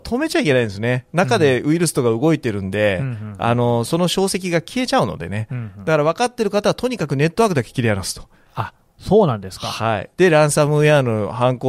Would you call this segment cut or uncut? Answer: cut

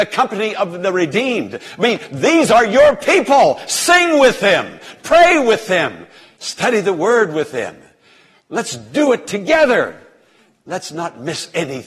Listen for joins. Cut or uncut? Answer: uncut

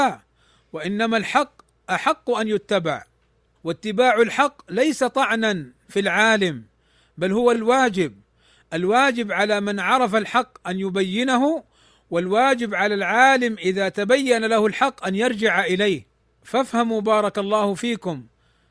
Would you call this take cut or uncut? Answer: uncut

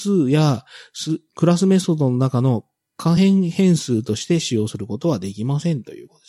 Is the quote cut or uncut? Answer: uncut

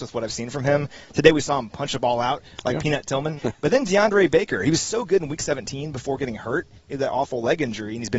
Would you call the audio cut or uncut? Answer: cut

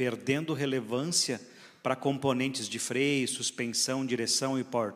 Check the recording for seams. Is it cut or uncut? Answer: uncut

